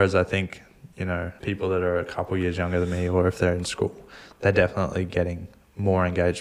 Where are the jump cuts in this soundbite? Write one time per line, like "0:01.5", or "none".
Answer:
none